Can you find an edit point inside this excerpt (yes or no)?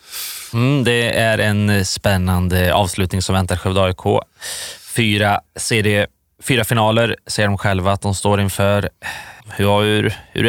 yes